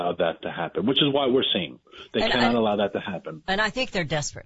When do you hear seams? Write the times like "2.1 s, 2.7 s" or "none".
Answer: none